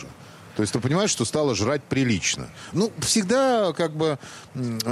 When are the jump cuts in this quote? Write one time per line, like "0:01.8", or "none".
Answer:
0:02.7